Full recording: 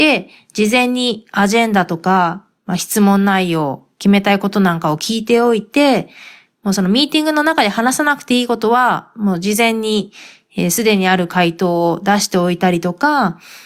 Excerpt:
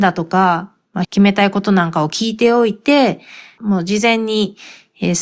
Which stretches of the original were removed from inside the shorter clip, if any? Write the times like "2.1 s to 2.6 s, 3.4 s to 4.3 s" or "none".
2.8 s to 3.9 s, 6.5 s to 9.1 s